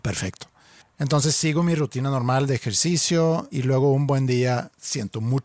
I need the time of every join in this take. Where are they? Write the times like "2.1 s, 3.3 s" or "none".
3.5 s